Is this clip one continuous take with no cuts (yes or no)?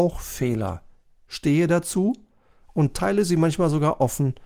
yes